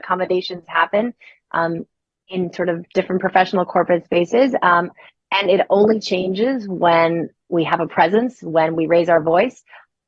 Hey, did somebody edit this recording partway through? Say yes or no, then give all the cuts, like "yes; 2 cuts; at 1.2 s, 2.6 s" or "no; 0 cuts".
no; 0 cuts